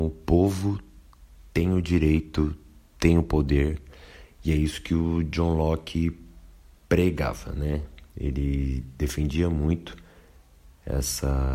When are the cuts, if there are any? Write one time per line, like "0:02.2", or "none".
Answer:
none